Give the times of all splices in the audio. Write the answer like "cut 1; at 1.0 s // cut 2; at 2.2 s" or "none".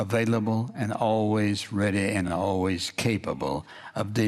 none